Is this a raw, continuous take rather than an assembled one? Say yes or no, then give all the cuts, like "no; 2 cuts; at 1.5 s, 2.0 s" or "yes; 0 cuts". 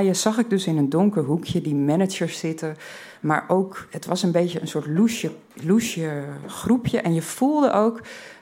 no; 1 cut; at 3.1 s